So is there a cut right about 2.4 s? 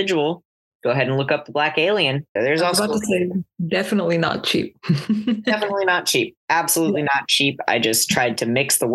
yes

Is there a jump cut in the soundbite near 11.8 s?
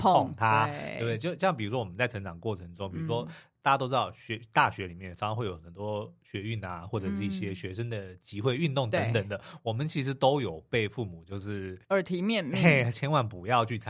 yes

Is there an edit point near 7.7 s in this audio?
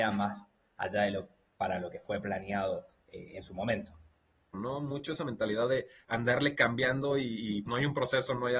yes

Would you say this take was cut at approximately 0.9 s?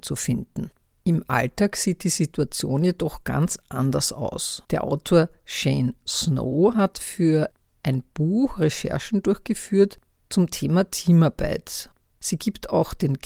no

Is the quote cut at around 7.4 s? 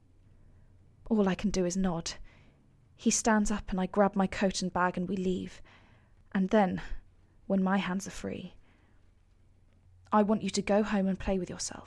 no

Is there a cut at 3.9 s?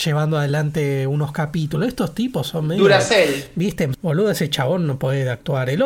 yes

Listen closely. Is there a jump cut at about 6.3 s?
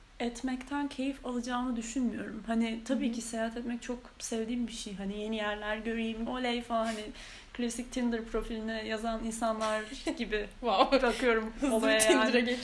yes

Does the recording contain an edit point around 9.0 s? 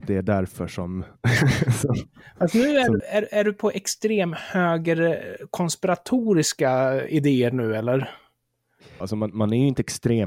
yes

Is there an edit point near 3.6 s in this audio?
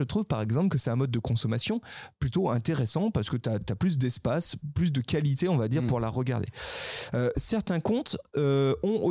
yes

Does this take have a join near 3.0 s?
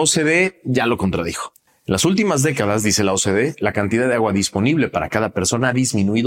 no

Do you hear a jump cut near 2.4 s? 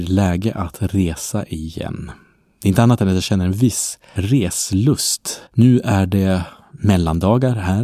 no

